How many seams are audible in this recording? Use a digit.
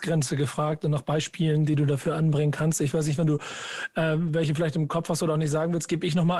0